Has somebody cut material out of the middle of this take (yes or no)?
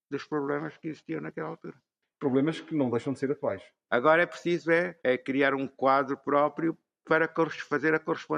yes